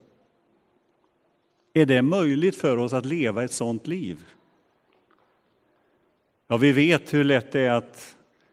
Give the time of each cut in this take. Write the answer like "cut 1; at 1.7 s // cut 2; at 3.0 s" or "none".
none